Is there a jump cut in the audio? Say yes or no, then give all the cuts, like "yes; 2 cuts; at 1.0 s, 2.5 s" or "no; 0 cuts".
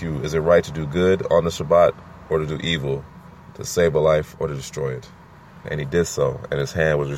yes; 1 cut; at 5.6 s